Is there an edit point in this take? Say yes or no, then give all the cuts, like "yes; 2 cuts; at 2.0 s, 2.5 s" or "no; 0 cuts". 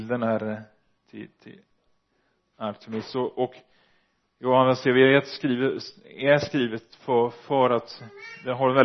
no; 0 cuts